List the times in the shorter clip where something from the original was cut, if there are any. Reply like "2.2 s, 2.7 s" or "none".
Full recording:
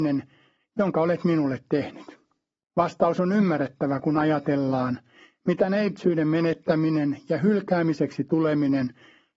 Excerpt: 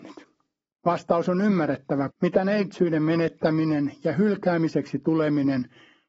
2.1 s